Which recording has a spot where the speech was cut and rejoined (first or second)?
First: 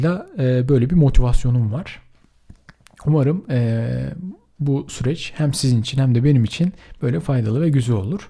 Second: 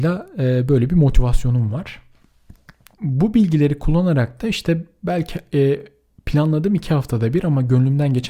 second